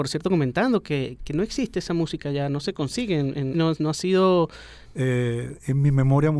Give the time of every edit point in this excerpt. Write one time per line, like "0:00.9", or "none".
0:01.2
0:03.5
0:04.9